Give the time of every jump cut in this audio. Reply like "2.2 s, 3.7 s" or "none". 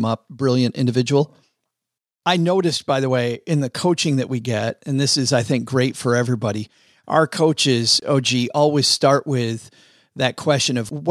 none